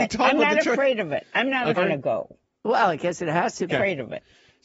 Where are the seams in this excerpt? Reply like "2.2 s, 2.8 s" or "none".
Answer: 1.8 s, 3.7 s